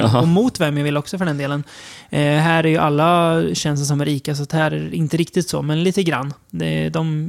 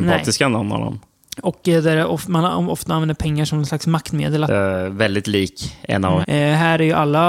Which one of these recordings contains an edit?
second; 2 cuts; at 4.5 s, 6.2 s

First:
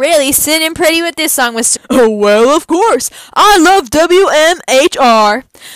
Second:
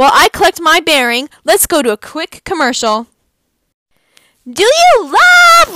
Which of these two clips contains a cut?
first; 1 cut; at 1.8 s

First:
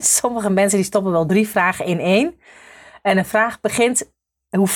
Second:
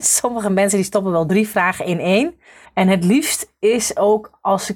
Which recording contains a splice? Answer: second; 1 cut; at 2.6 s

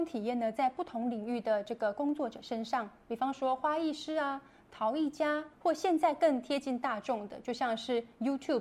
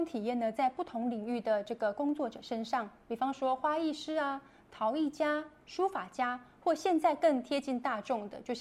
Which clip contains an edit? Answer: first; 1 cut; at 5.5 s

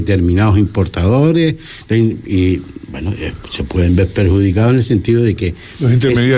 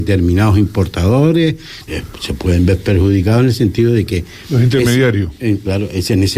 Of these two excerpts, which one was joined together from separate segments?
second; 1 cut; at 1.9 s

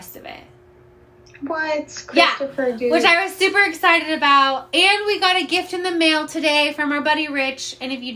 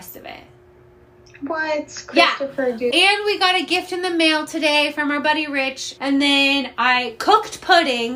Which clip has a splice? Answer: second; 2 cuts; at 2.9 s, 6.0 s

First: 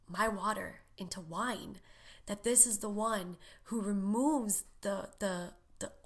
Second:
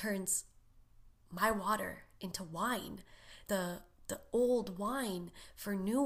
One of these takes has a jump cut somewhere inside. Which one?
second; 1 cut; at 3.4 s

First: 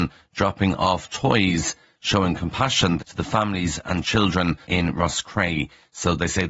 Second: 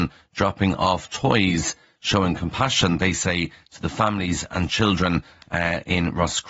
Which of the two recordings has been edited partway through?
first; 2 cuts; at 3.0 s, 4.6 s

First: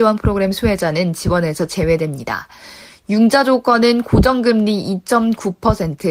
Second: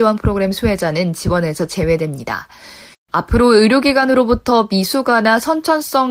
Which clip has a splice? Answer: second; 1 cut; at 2.9 s

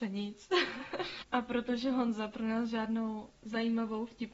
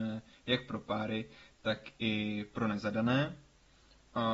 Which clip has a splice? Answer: first; 1 cut; at 1.2 s

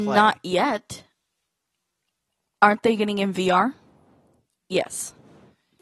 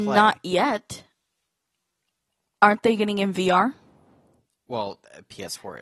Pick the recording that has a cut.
first; 1 cut; at 4.6 s

